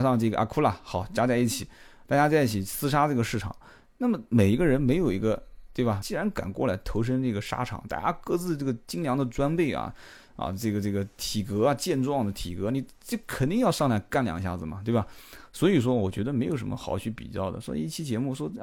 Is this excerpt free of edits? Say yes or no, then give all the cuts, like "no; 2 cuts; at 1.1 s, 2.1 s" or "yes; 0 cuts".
no; 1 cut; at 6.0 s